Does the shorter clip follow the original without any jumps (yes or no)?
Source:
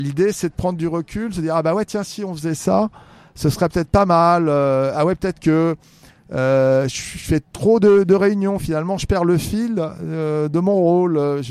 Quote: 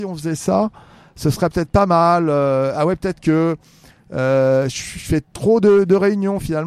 yes